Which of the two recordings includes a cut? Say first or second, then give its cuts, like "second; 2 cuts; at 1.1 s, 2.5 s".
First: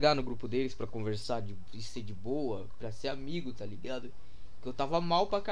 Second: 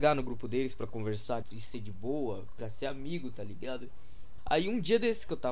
second; 2 cuts; at 1.4 s, 4.4 s